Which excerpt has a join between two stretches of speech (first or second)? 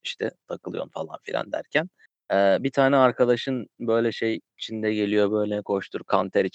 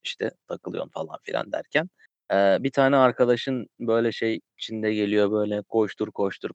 first